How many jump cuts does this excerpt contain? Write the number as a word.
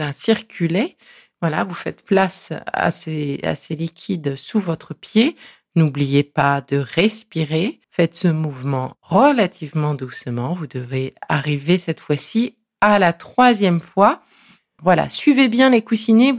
two